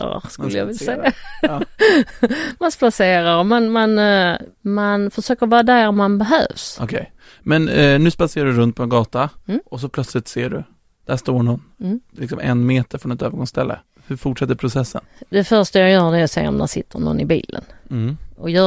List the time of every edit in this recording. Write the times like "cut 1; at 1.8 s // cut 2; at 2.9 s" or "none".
none